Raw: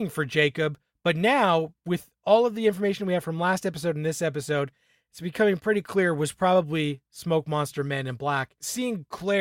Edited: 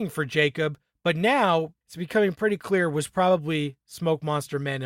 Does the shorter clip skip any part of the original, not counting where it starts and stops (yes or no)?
yes